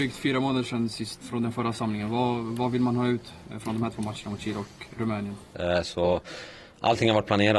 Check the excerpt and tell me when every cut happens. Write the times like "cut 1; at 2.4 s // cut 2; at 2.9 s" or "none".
cut 1; at 1.2 s // cut 2; at 5.5 s